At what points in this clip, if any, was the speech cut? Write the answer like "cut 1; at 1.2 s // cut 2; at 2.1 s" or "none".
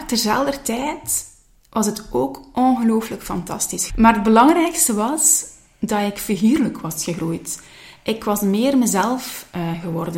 cut 1; at 3.9 s